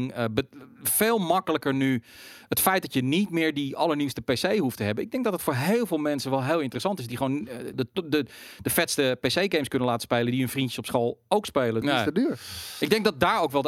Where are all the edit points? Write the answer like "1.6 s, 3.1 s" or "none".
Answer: 7.7 s, 11.8 s